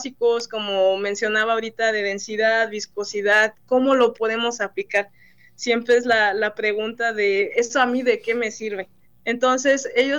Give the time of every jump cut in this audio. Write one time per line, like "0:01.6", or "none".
0:09.0